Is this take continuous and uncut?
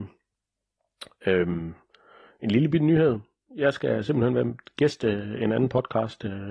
yes; 0 cuts

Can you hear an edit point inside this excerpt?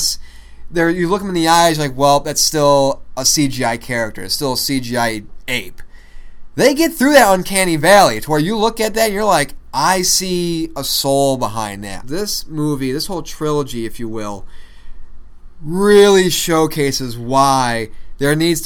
yes; 1 cut; at 12.0 s

